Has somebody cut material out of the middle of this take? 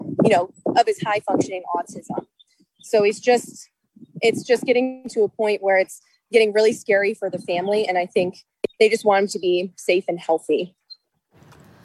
no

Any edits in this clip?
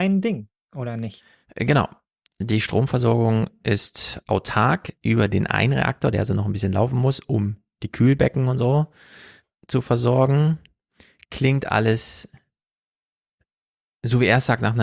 no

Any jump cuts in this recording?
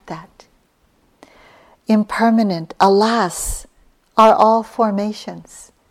no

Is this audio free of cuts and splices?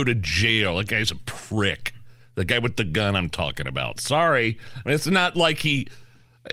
yes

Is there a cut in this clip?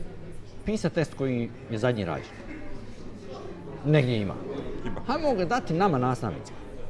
no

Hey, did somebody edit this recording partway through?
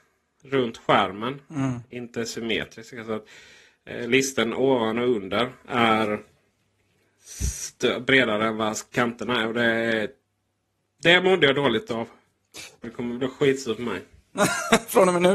yes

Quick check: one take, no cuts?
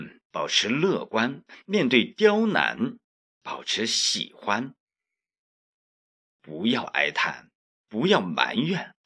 no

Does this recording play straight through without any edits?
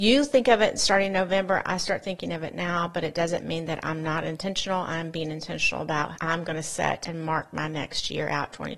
yes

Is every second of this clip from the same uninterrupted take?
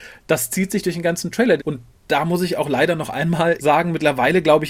no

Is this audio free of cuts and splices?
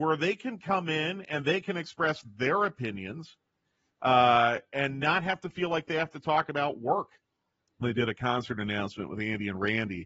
no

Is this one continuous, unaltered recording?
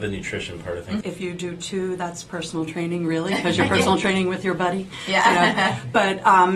no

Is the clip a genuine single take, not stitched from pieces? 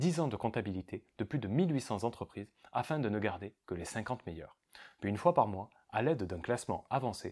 yes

